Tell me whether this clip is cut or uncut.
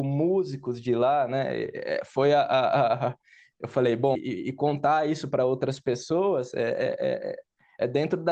cut